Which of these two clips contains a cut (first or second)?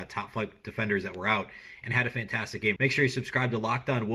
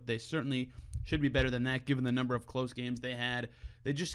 first